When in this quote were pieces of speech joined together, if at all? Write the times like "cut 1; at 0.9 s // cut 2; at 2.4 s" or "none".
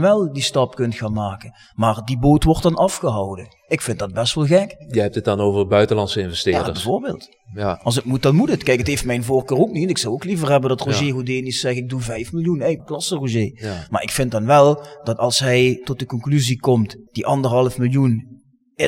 cut 1; at 12.8 s // cut 2; at 13.9 s